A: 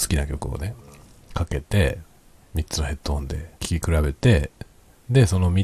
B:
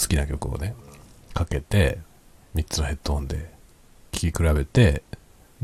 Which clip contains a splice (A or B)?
A